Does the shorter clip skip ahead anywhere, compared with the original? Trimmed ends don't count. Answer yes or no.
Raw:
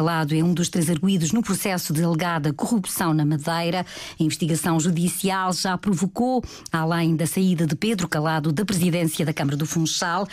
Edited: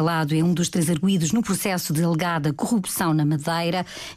no